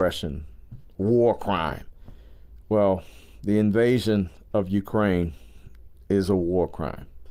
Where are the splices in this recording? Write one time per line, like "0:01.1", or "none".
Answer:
0:02.6